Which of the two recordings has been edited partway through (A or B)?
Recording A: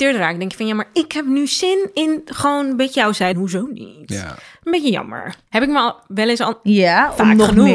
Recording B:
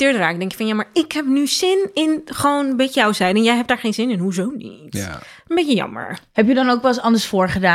A